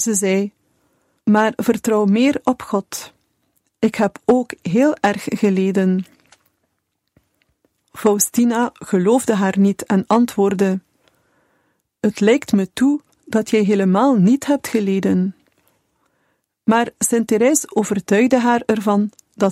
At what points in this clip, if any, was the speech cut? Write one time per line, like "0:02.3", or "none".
0:01.2